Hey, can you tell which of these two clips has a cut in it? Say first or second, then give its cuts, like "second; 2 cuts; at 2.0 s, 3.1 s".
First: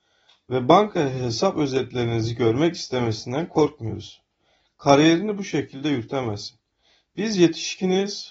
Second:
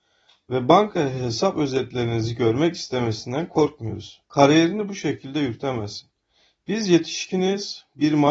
second; 1 cut; at 4.2 s